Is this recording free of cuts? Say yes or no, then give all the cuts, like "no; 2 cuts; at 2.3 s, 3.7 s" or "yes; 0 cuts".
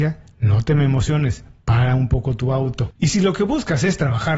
no; 1 cut; at 3.0 s